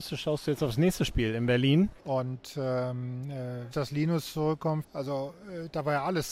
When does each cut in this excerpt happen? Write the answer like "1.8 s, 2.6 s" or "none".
2.0 s, 3.7 s, 4.8 s